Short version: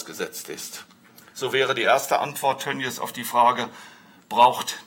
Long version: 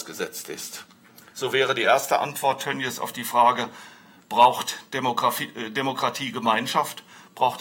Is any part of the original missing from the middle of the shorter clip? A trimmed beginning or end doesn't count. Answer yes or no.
no